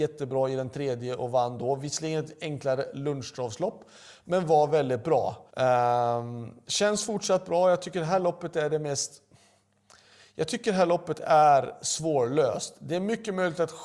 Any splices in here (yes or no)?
yes